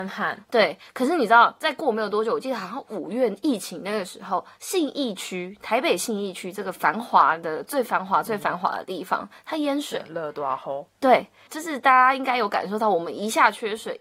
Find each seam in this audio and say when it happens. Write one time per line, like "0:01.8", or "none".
none